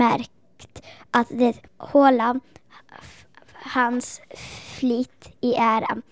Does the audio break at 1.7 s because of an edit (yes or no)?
yes